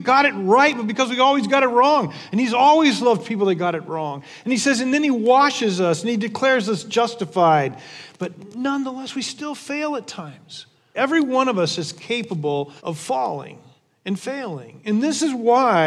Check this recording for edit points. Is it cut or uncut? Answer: cut